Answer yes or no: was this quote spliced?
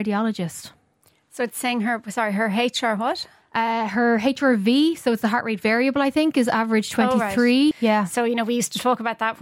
yes